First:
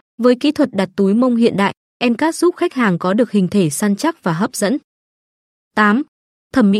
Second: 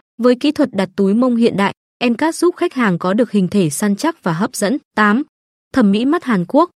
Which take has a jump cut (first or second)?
second